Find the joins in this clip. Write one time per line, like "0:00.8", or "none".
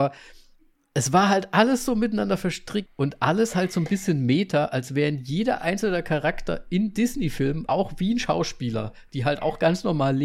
0:02.9
0:07.7